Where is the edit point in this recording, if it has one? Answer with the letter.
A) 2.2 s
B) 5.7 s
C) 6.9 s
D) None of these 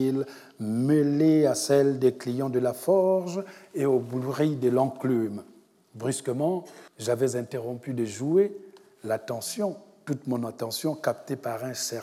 C